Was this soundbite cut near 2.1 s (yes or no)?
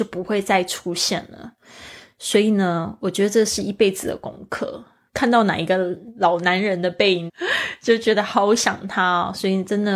no